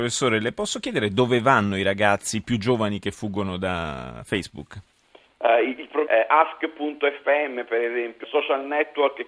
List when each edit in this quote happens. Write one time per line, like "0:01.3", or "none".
0:06.1
0:08.2